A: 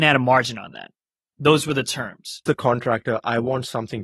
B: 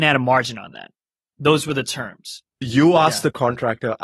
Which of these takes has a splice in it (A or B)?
A